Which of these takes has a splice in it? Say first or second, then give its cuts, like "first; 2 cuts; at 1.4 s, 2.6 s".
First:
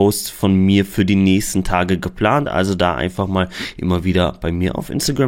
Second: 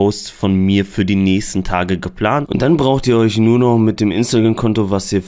second; 1 cut; at 2.5 s